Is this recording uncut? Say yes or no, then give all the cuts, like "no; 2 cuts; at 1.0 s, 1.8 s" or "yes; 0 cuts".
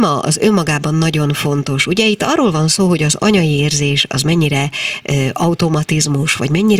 yes; 0 cuts